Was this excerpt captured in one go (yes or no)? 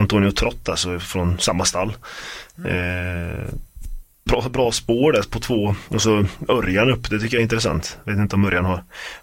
no